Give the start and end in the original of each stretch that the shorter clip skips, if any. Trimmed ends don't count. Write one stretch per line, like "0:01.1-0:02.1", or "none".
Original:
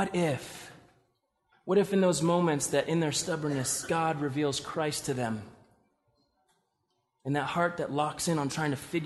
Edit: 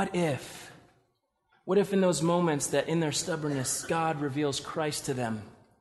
none